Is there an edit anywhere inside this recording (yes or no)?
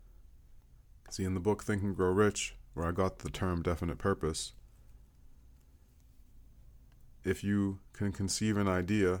yes